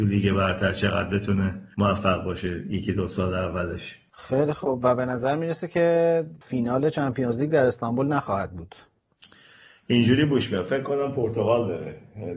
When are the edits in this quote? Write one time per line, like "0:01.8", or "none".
none